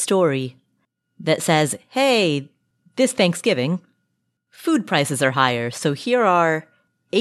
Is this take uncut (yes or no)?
yes